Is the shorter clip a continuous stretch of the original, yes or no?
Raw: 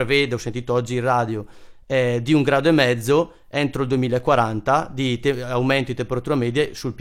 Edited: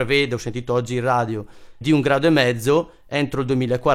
no